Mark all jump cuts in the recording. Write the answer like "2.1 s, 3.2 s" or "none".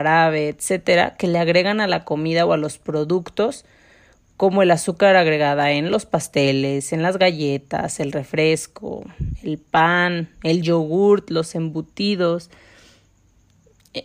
none